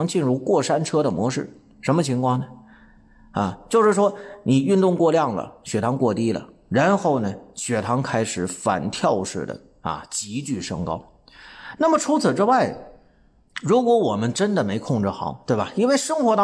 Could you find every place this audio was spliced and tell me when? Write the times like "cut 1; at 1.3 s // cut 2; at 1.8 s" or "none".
cut 1; at 11.8 s